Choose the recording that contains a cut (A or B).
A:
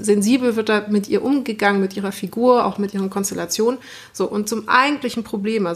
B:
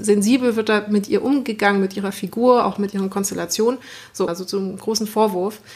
B